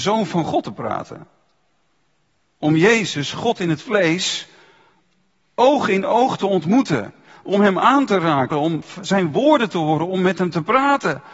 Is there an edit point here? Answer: yes; 1 cut; at 8.5 s

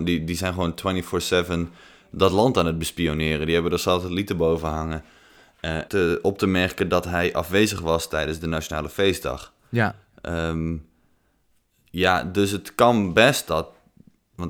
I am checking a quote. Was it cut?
yes; 1 cut; at 5.9 s

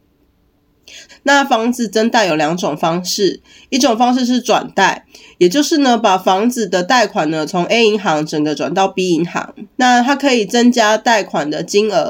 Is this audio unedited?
no; 2 cuts; at 1.1 s, 9.7 s

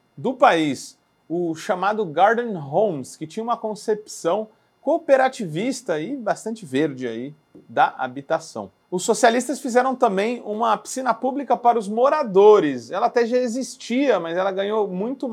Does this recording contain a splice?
no; 0 cuts

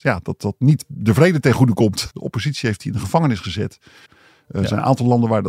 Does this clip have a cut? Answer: yes; 2 cuts; at 2.1 s, 4.1 s

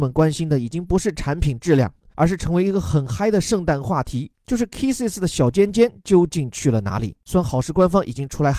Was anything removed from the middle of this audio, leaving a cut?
no; 0 cuts

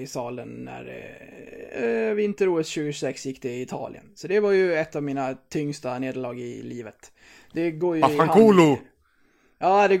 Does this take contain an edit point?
no; 0 cuts

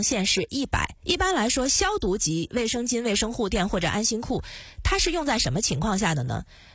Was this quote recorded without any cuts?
no; 1 cut; at 1.0 s

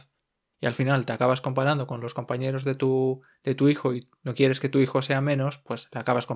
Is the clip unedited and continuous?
yes; 0 cuts

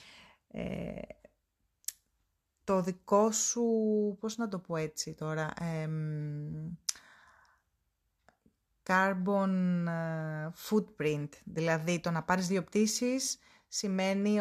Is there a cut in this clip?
no; 0 cuts

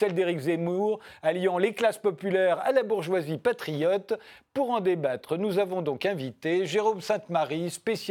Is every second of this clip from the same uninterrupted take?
yes; 0 cuts

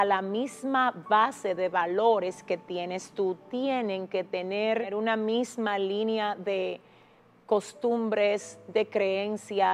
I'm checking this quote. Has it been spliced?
no; 0 cuts

